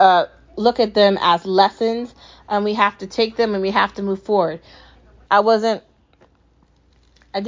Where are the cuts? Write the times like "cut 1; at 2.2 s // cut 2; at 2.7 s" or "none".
cut 1; at 5.2 s

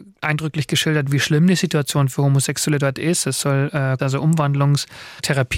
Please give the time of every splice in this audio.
cut 1; at 1.1 s // cut 2; at 4.0 s

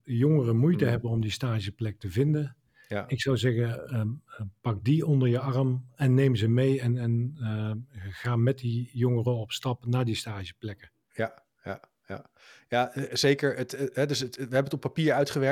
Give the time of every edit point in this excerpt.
none

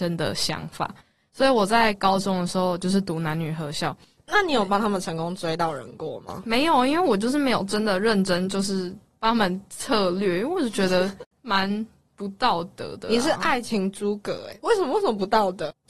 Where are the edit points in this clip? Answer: cut 1; at 4.2 s // cut 2; at 11.3 s

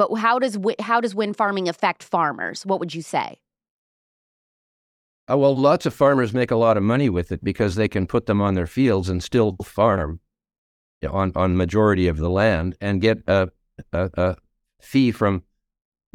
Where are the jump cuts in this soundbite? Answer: none

